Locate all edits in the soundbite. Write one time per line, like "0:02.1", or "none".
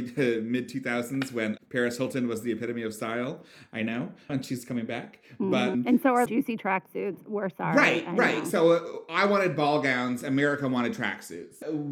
0:04.3
0:06.3